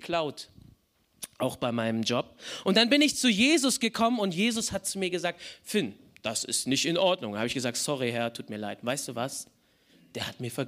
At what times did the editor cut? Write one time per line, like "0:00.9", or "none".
none